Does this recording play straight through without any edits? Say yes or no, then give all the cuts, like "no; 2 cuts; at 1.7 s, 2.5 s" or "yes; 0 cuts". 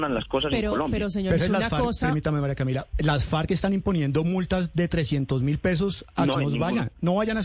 no; 2 cuts; at 1.4 s, 6.3 s